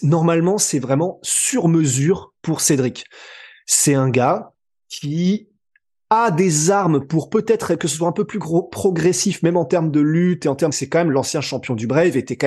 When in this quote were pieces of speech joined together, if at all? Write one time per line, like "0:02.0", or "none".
0:10.7